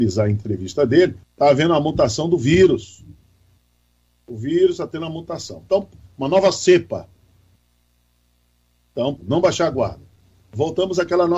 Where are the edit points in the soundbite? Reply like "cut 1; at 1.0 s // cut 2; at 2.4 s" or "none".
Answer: cut 1; at 1.2 s // cut 2; at 9.2 s